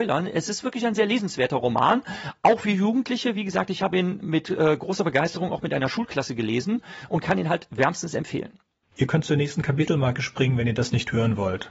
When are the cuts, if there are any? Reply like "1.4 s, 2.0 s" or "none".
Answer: 8.8 s